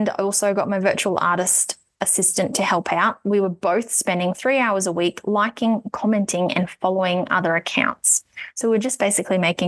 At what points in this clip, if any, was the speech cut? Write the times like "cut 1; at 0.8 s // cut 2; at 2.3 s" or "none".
none